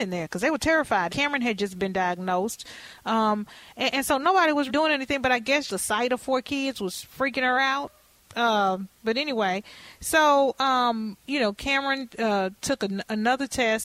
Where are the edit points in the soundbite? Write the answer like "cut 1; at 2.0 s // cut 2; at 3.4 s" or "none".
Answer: cut 1; at 1.1 s // cut 2; at 4.7 s // cut 3; at 5.7 s